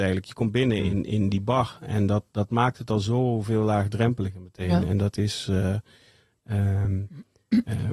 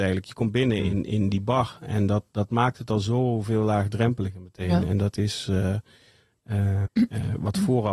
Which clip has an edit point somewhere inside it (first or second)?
second